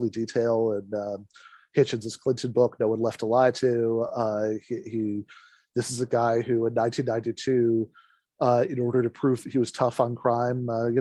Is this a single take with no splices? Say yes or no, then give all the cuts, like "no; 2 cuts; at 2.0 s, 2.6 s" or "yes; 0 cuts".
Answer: yes; 0 cuts